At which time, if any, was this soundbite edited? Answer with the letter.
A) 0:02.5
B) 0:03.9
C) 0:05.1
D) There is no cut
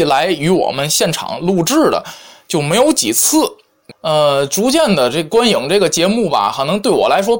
B